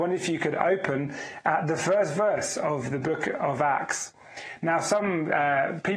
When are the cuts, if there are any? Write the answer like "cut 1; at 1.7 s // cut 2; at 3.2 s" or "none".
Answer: none